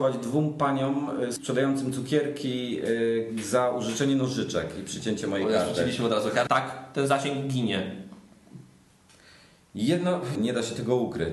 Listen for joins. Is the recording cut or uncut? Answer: cut